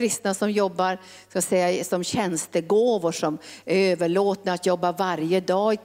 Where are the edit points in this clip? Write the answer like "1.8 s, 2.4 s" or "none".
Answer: none

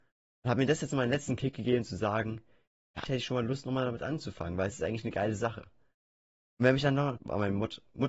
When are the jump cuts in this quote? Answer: 3.1 s, 7.2 s

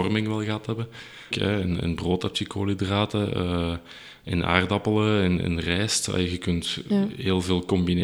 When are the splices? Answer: 1.3 s

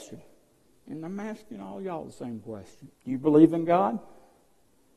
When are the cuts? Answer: 2.9 s

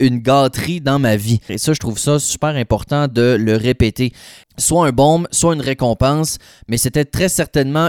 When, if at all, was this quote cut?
1.5 s, 4.4 s

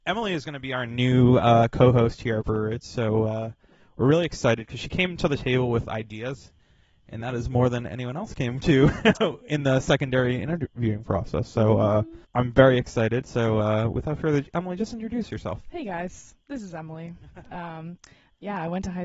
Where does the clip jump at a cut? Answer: 12.2 s, 17.4 s

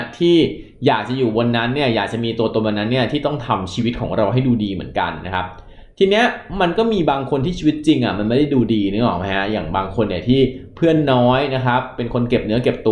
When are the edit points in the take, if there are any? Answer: none

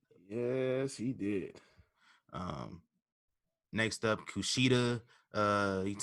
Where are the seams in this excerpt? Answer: none

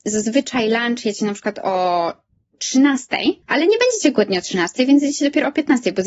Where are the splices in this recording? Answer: 3.4 s

